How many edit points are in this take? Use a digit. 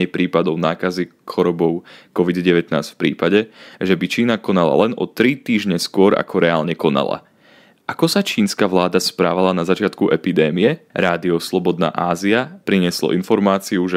1